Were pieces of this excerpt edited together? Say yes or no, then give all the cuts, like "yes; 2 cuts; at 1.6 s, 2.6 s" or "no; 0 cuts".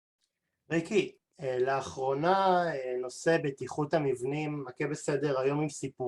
no; 0 cuts